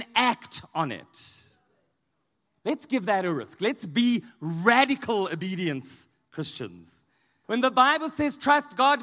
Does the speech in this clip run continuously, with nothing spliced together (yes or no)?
no